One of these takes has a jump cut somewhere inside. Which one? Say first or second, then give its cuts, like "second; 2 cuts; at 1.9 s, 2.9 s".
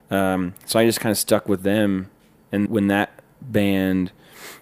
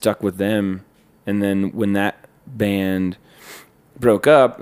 first; 1 cut; at 2.7 s